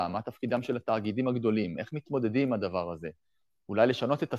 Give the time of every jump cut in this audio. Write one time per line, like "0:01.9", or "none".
none